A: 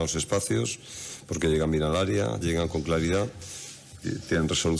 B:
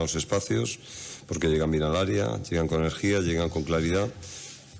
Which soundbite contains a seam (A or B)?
A